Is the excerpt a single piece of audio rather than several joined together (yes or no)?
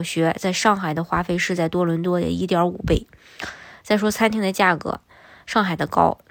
yes